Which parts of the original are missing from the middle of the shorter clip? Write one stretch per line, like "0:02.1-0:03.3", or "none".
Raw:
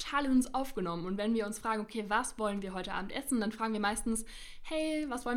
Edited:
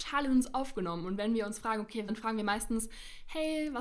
0:02.1-0:03.4

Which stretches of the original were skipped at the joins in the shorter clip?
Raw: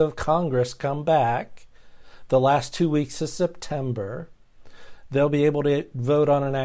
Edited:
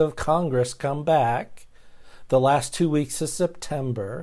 none

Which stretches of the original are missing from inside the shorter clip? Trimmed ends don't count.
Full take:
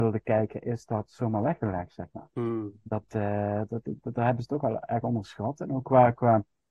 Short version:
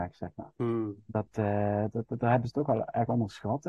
0:03.8-0:04.0

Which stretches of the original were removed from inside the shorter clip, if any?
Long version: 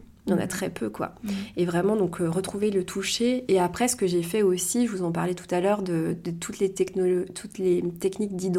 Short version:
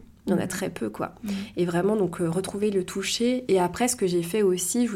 none

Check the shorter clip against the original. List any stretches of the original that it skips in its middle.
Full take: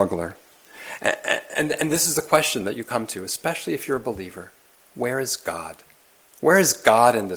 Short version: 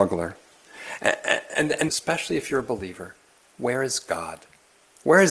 0:01.9-0:03.3

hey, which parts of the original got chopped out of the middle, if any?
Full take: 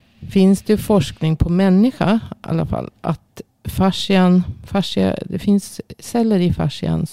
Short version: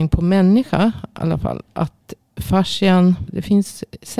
0:04.6-0:05.2

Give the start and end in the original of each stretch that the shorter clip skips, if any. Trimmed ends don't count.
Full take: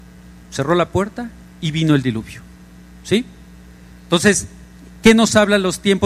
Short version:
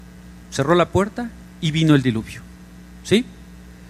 none

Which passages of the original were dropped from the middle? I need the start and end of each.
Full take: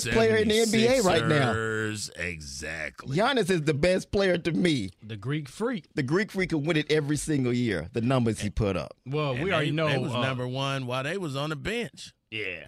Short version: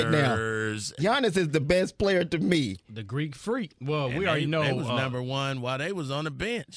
0:02.1-0:03.1
0:05.9-0:09.0

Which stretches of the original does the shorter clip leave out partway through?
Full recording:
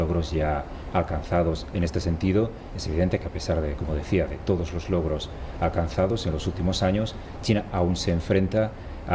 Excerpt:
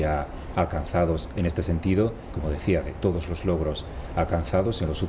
0:02.7-0:03.7

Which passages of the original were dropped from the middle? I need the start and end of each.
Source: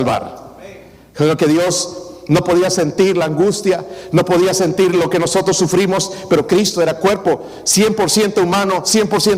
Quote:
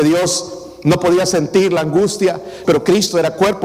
0:04.1-0:06.3

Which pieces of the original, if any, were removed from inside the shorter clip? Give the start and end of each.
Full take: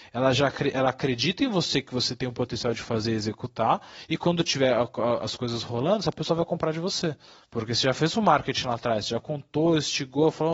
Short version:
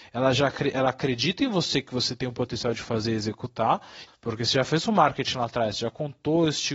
0:04.1-0:07.4

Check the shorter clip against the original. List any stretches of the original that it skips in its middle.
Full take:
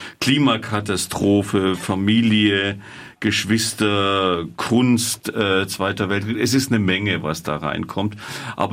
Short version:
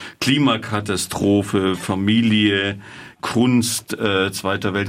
0:03.2-0:04.5

